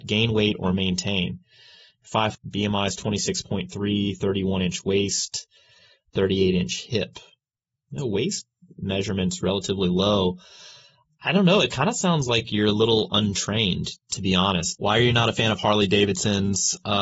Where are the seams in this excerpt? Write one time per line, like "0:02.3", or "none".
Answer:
0:02.3
0:14.7

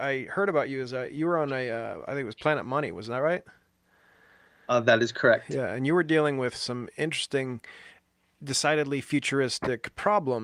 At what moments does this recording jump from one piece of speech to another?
none

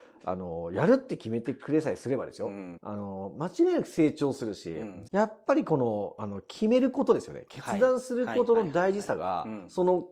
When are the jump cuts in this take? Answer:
0:02.7
0:05.0

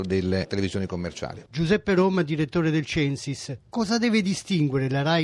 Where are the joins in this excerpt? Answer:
none

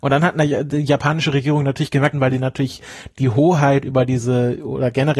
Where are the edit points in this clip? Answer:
0:02.1

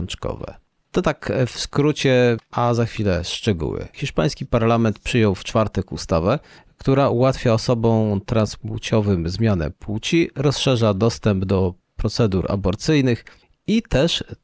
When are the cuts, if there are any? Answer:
0:03.9

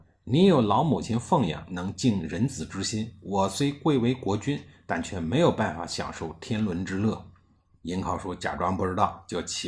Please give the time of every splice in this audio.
none

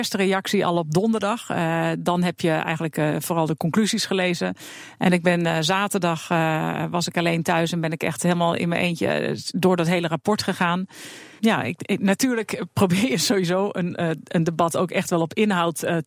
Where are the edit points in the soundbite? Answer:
0:11.4

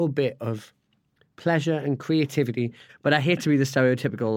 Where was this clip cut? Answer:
0:02.9

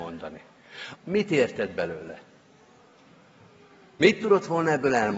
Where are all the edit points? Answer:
0:00.9

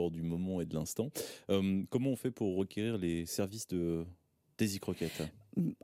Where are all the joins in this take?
none

